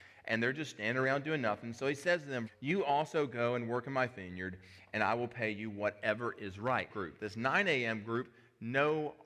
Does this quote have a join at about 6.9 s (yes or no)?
yes